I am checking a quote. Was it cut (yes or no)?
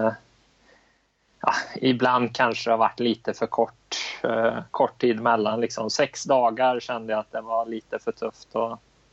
no